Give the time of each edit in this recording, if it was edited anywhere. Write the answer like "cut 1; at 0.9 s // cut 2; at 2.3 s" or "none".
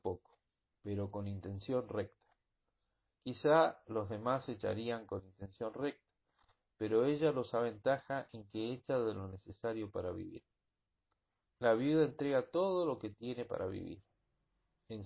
cut 1; at 11.4 s